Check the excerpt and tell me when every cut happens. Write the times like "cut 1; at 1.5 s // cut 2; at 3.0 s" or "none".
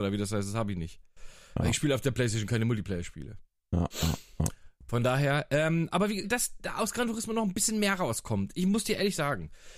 cut 1; at 4.8 s // cut 2; at 6.2 s